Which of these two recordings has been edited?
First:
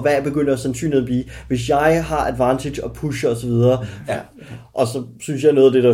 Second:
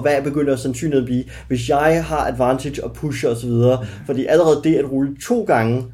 first; 1 cut; at 4.1 s

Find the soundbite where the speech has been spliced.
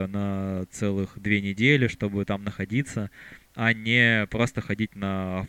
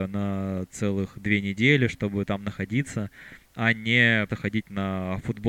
second; 1 cut; at 4.3 s

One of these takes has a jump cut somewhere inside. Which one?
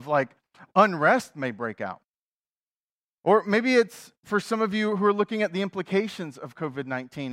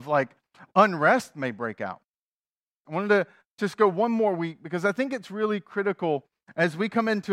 second; 1 cut; at 2.8 s

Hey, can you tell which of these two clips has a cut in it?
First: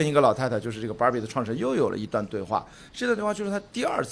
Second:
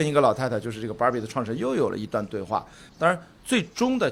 second; 1 cut; at 2.9 s

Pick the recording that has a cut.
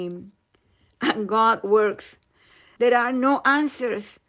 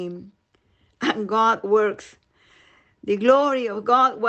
first; 1 cut; at 2.8 s

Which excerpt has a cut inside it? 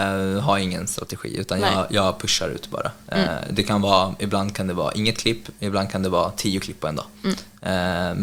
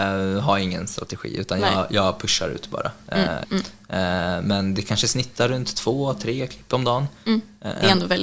second; 1 cut; at 3.4 s

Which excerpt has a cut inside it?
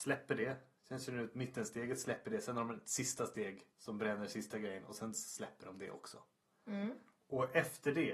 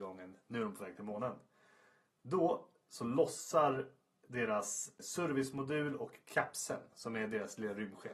first; 1 cut; at 3.7 s

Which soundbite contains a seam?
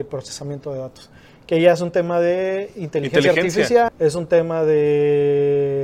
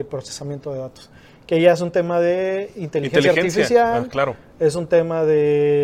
first; 1 cut; at 3.9 s

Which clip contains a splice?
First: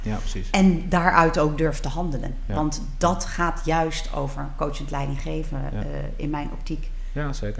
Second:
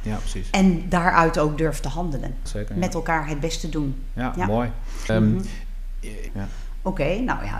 second; 3 cuts; at 2.5 s, 5.1 s, 6.3 s

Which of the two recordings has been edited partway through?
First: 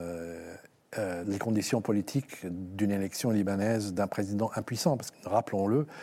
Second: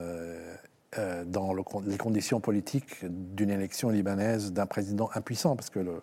first; 2 cuts; at 1.2 s, 5.1 s

